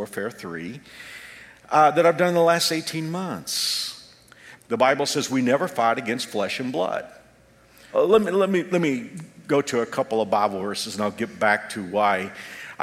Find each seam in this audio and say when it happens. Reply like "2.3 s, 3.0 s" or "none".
4.6 s, 7.9 s